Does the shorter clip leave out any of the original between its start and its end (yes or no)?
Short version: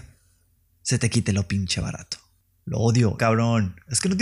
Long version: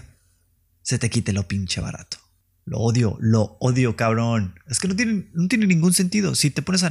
yes